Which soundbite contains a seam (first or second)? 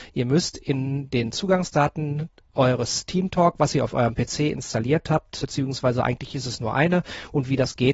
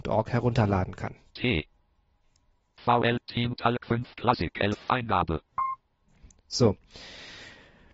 first